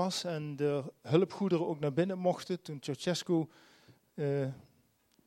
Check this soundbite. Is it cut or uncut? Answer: uncut